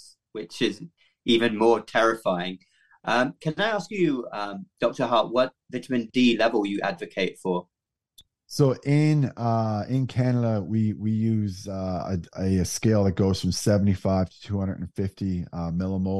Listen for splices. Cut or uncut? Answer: uncut